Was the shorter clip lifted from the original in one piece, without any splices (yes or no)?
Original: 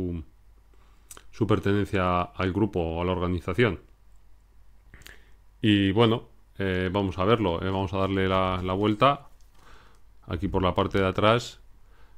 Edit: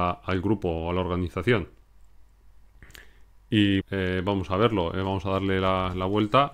no